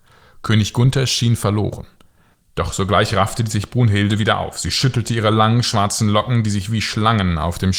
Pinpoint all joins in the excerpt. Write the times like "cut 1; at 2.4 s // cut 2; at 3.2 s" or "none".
cut 1; at 2.3 s